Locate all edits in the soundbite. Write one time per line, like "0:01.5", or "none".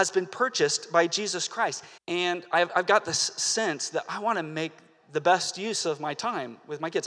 0:02.0